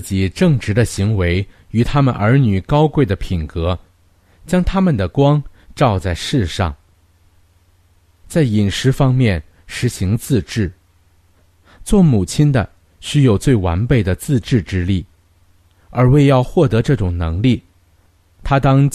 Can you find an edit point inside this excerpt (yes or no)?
no